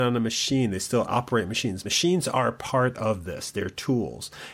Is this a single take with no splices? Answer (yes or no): yes